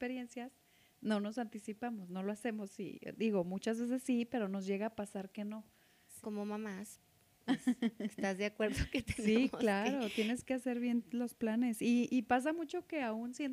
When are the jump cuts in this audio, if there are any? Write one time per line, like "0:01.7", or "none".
0:06.2